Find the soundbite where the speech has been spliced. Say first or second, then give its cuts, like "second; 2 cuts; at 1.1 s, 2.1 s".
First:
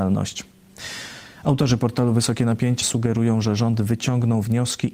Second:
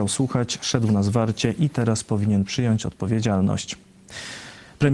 first; 2 cuts; at 1.4 s, 2.8 s